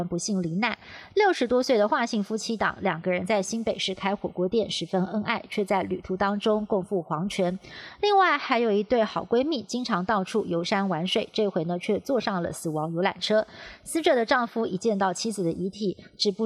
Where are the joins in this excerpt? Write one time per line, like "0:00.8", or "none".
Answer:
none